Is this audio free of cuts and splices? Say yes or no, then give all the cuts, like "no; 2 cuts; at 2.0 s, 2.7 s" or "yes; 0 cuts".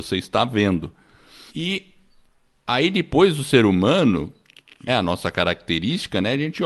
no; 2 cuts; at 1.5 s, 4.9 s